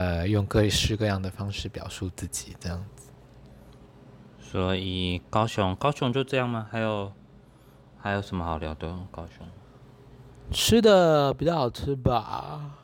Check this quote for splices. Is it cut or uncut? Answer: uncut